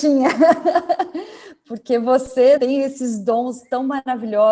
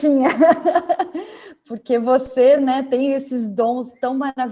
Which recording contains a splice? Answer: first; 1 cut; at 2.6 s

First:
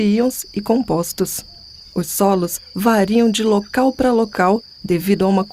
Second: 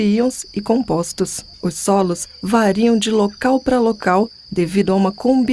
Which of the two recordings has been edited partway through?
second; 1 cut; at 1.5 s

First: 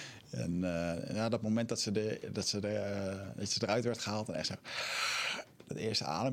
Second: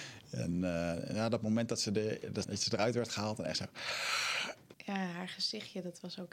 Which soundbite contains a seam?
second; 2 cuts; at 2.4 s, 4.7 s

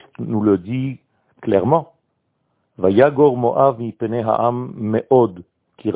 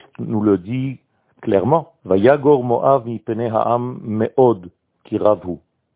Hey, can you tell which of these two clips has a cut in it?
second; 1 cut; at 2.0 s

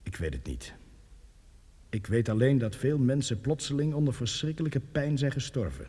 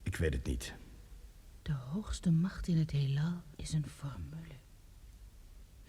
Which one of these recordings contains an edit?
second; 2 cuts; at 1.6 s, 3.5 s

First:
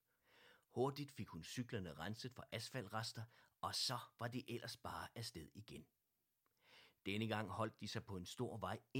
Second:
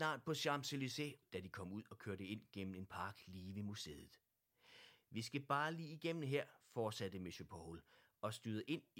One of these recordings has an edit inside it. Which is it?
second; 1 cut; at 1.2 s

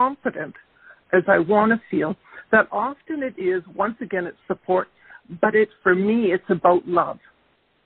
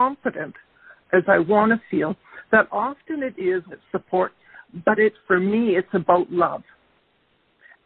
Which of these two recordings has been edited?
second; 1 cut; at 3.7 s

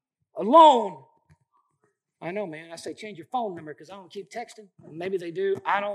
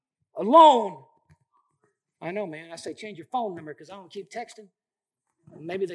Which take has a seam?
first; 1 cut; at 4.8 s

